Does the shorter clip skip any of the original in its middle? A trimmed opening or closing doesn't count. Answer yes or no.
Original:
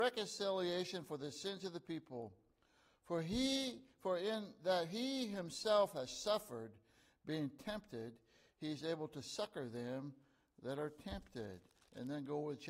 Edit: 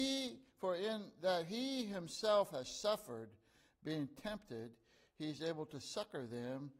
no